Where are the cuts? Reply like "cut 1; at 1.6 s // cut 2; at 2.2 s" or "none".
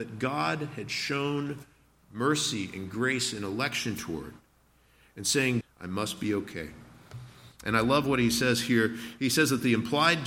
cut 1; at 5.6 s // cut 2; at 7.5 s